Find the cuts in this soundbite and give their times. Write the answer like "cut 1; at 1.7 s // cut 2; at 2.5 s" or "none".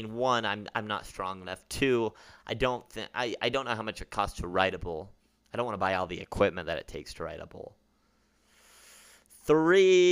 cut 1; at 3.1 s

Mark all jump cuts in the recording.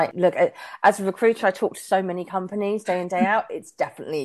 none

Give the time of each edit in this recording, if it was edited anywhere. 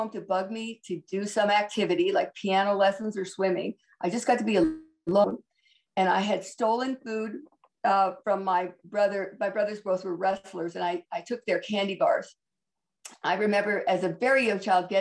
cut 1; at 13.1 s

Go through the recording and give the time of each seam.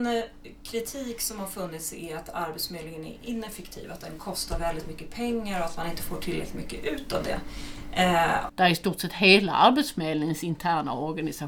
cut 1; at 8.5 s

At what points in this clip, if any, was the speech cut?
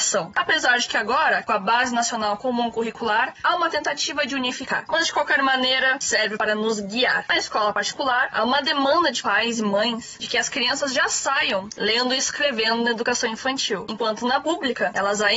cut 1; at 4.9 s // cut 2; at 7.3 s

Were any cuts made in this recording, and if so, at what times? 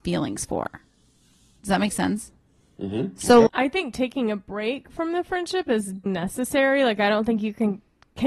cut 1; at 3.5 s // cut 2; at 6.1 s

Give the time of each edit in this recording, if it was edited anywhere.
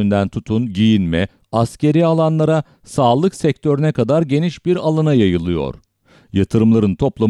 cut 1; at 1.4 s

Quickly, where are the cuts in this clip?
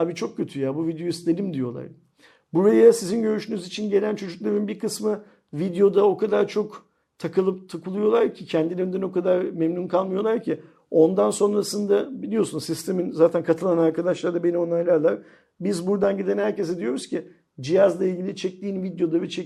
none

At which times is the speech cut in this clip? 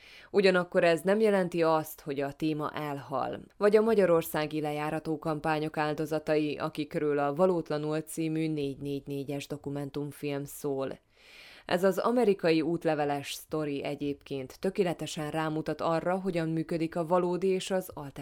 cut 1; at 3.5 s

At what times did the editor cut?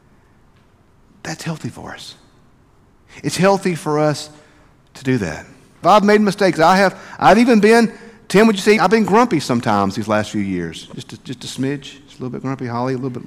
cut 1; at 5.8 s // cut 2; at 8.8 s

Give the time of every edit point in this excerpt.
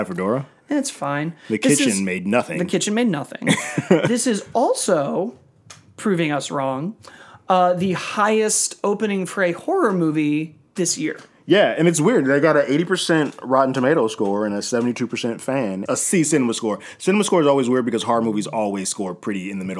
cut 1; at 15.9 s

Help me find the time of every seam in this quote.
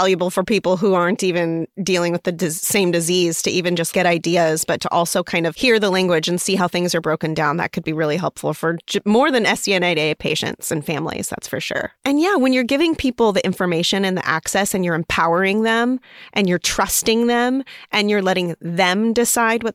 cut 1; at 3.9 s

